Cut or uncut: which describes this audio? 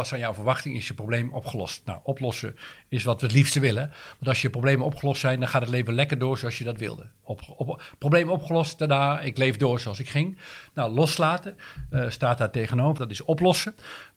cut